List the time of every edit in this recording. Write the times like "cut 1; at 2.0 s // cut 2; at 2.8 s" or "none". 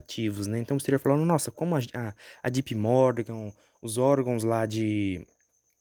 none